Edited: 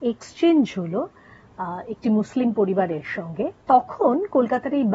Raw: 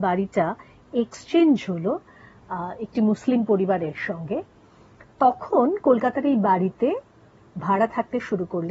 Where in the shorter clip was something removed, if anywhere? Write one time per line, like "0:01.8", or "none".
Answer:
0:03.6

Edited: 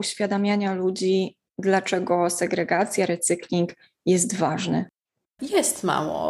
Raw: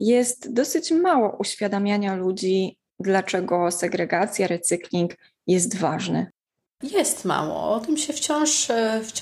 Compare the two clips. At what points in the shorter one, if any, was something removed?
none

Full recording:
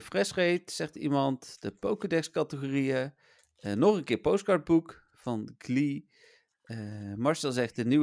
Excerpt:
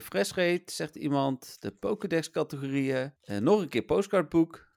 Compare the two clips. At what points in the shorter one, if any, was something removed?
0:03.2

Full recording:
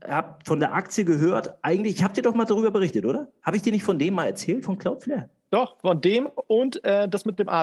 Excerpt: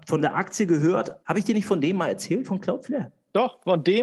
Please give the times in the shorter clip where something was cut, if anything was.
0:01.2

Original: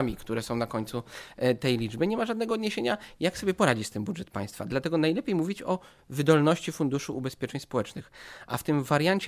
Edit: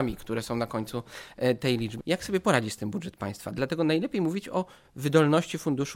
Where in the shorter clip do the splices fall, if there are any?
0:02.0

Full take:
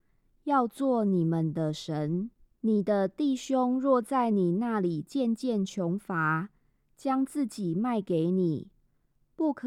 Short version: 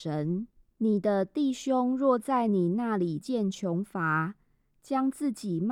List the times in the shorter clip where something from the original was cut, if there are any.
0:03.2

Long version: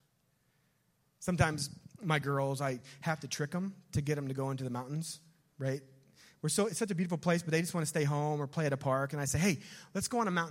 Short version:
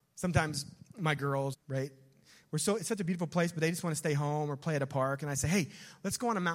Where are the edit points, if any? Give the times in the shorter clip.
0:01.5

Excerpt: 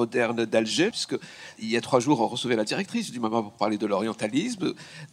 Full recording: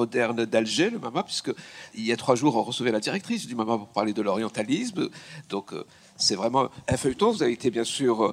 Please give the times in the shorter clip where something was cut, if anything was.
0:00.9

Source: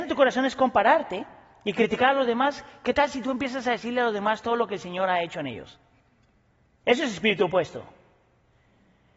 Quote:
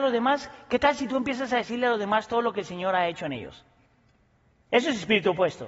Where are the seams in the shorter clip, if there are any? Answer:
none

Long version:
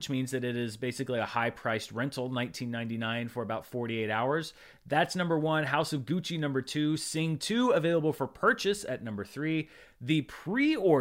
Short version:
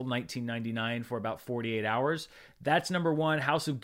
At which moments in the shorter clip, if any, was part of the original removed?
none

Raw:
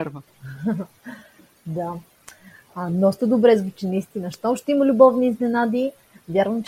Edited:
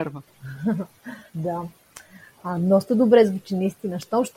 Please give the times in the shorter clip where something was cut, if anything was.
0:01.3

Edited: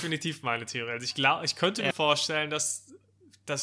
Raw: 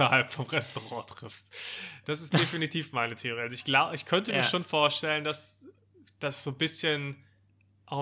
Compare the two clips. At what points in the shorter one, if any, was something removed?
0:01.9

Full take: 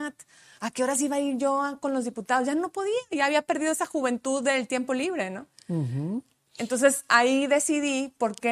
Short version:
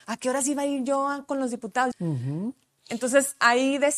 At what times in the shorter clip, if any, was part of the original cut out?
0:01.9

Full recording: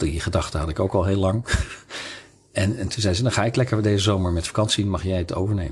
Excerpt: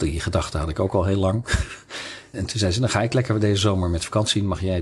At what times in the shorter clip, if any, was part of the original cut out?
0:02.3

